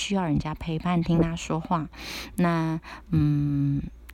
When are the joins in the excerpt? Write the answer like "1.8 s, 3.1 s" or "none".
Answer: none